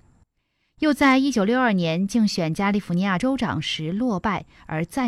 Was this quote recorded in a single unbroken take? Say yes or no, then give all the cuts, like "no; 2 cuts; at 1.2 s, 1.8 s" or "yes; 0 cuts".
no; 1 cut; at 3.2 s